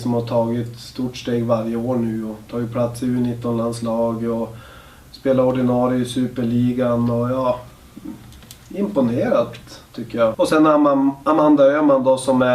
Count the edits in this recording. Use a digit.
1